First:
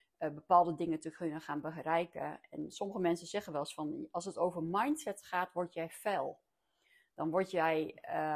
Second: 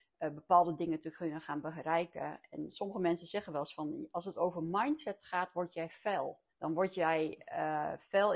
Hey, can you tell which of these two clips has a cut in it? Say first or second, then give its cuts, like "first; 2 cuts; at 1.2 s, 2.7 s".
second; 1 cut; at 6.5 s